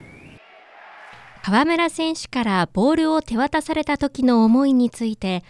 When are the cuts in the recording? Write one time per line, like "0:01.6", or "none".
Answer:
0:01.4